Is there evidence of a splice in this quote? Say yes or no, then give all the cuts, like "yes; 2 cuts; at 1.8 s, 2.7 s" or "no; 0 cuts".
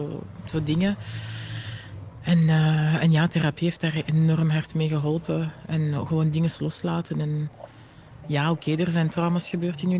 yes; 1 cut; at 8.2 s